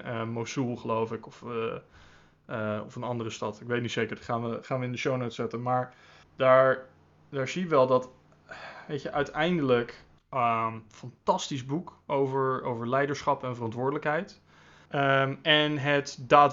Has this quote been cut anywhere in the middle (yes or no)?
yes